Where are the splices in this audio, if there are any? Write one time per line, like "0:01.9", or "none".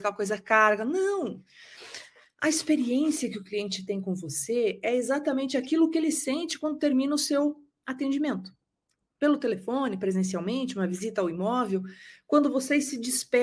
none